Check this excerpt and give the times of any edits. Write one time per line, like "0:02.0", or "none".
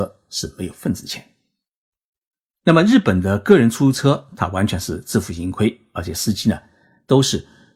none